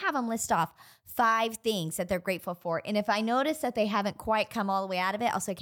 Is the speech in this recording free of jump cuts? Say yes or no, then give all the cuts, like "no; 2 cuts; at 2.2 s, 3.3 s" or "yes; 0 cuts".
yes; 0 cuts